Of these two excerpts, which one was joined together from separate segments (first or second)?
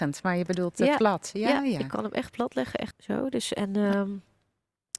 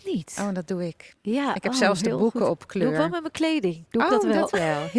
first